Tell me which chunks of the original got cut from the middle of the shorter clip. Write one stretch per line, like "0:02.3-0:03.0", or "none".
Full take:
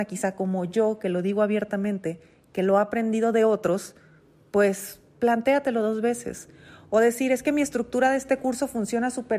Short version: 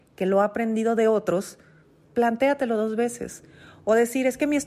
0:04.4-0:05.1